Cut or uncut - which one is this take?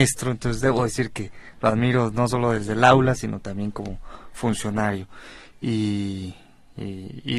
uncut